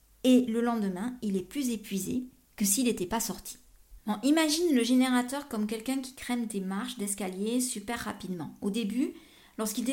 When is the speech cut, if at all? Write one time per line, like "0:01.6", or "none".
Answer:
none